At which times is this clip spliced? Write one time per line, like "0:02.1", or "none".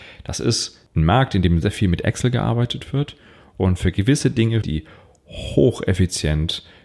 0:01.6
0:04.6